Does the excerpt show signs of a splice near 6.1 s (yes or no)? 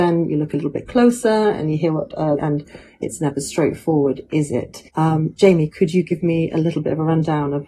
no